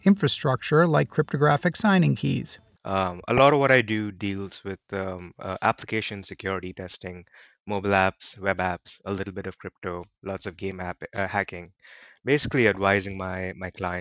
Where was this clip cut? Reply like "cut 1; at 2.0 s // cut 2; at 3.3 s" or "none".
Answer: cut 1; at 2.8 s